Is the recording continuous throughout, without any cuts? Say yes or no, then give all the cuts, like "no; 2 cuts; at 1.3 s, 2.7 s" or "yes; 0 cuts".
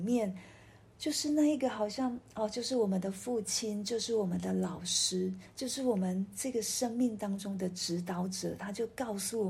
yes; 0 cuts